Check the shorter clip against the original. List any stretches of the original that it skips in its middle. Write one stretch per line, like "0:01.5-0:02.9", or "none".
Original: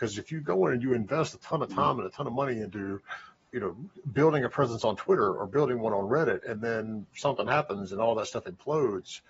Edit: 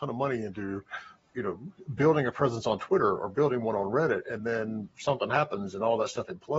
none

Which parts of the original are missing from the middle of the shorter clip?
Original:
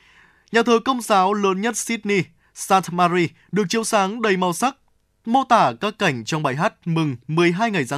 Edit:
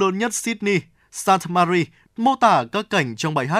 0:03.5-0:05.2

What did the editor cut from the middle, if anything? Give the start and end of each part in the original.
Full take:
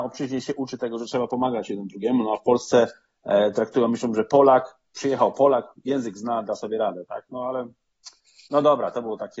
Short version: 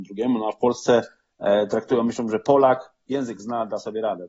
0:04.9-0:05.8

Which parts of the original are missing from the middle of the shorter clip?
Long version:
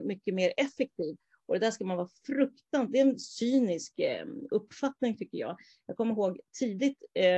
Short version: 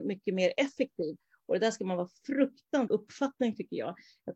0:02.9-0:04.5

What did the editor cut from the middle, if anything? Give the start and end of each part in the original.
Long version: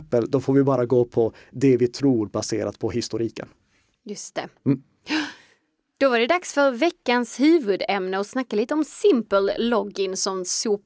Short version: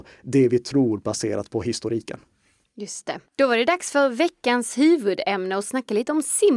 0:04.5-0:05.9

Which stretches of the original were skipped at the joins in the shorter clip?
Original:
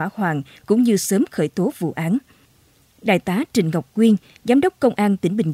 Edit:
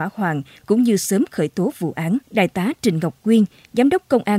0:02.2-0:02.9

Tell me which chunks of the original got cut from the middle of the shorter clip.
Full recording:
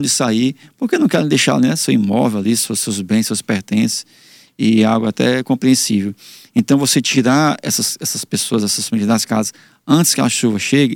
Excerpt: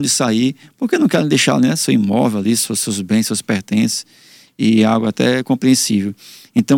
none

